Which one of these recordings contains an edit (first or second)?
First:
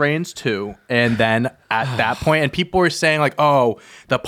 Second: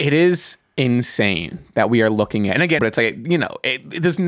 second